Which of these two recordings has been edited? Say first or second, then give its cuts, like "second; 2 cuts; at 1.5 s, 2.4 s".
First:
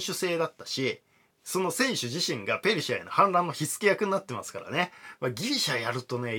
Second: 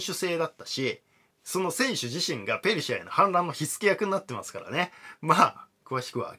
first; 1 cut; at 5.2 s